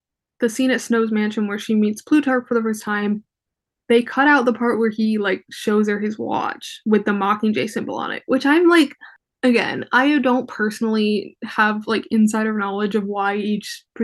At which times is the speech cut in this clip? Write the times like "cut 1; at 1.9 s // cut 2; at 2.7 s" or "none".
none